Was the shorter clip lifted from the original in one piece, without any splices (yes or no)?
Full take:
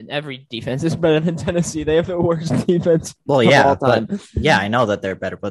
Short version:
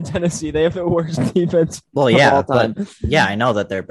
yes